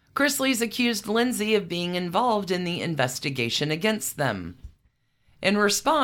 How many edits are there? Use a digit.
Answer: 0